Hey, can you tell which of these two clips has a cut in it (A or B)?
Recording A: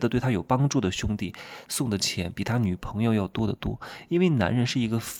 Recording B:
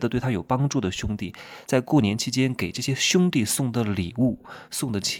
A